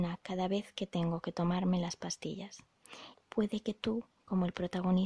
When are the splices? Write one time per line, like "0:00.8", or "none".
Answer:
0:03.1

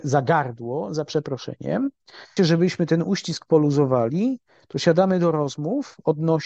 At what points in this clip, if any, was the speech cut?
0:02.4

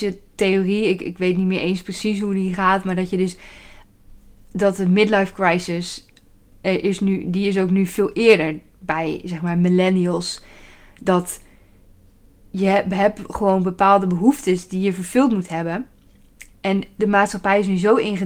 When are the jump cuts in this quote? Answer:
none

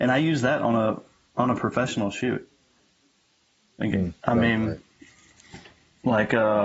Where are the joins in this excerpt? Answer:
0:04.2

